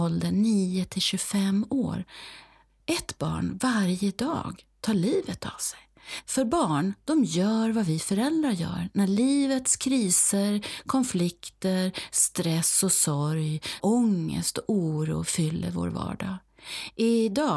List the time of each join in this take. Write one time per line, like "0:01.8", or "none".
0:06.2
0:13.8